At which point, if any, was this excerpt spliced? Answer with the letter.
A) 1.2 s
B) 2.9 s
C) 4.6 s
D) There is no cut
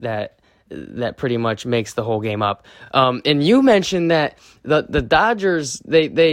D